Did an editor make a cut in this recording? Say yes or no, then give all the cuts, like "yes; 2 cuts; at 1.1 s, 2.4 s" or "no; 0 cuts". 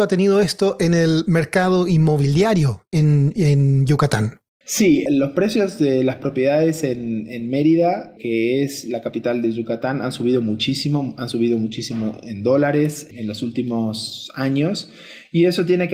no; 0 cuts